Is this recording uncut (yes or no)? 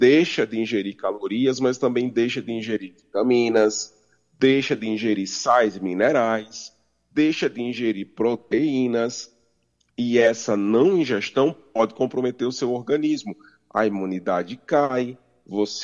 yes